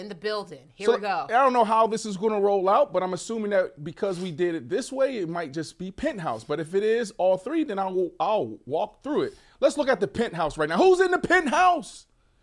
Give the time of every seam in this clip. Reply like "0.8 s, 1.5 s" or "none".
none